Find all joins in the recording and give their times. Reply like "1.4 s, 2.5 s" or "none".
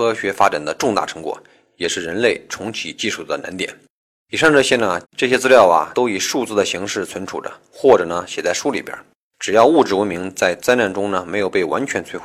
5.0 s